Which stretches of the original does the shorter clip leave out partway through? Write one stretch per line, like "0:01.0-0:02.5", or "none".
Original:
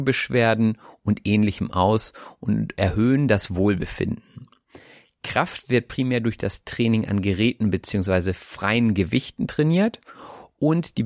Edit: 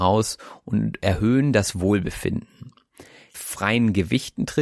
0:05.1-0:08.4